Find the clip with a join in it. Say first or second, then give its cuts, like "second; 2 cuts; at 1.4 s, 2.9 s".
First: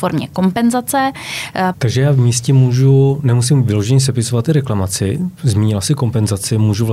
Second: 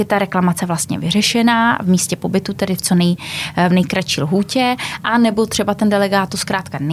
first; 1 cut; at 1.7 s